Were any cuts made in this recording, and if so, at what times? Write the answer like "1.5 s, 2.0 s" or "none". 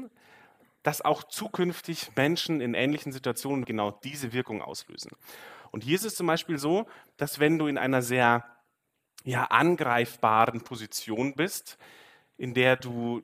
3.6 s